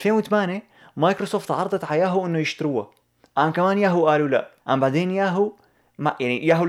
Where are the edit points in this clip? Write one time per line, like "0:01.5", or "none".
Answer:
0:04.6